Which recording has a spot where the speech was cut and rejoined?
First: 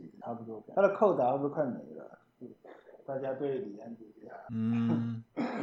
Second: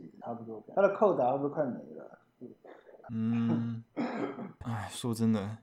second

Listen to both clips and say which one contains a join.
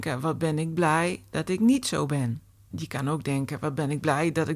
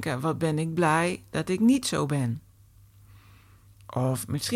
first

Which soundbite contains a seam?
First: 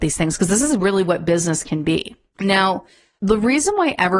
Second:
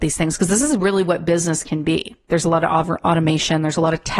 second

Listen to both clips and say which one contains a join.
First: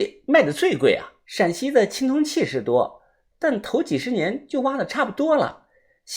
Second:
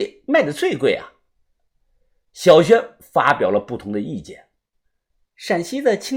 first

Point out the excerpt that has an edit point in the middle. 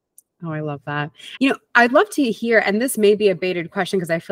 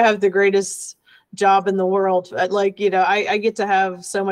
first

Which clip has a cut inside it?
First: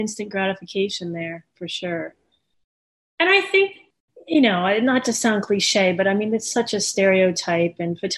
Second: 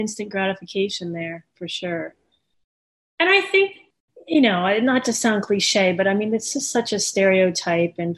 first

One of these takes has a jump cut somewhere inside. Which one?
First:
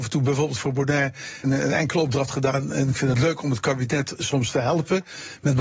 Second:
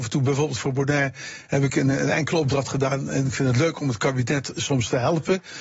first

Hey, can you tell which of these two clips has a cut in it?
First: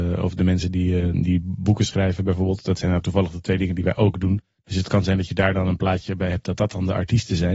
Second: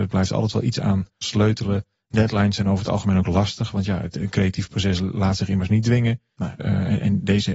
second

